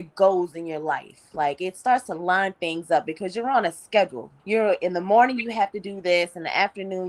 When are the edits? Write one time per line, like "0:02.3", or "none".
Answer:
0:04.4